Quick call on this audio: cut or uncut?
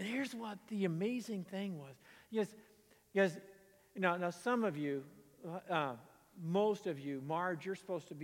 uncut